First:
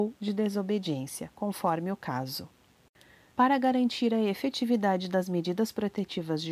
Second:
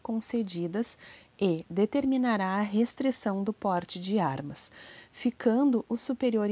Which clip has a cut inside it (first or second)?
first